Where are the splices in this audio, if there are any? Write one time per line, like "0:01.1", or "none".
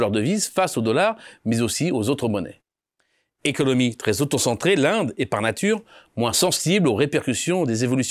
none